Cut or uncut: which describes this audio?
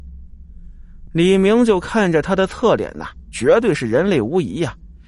uncut